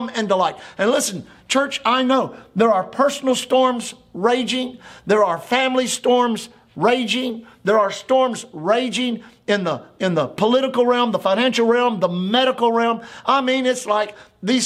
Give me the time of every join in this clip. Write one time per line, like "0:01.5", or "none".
none